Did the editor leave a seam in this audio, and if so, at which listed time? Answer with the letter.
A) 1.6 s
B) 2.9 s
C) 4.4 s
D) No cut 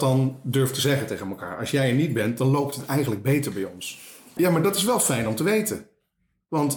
C